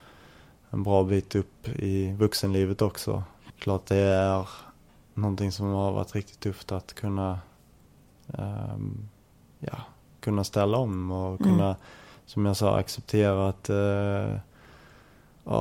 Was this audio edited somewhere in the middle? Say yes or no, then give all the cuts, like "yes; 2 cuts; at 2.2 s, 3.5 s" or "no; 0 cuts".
yes; 1 cut; at 3.5 s